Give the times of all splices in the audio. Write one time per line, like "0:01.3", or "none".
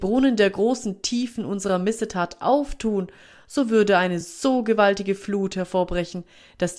none